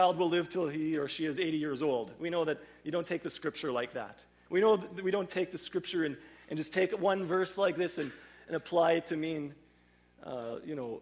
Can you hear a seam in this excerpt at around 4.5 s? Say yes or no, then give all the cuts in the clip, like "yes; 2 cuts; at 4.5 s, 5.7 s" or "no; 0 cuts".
yes; 1 cut; at 4.5 s